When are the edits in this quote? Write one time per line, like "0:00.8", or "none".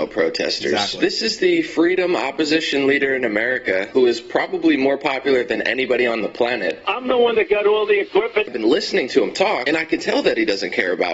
0:06.8
0:08.5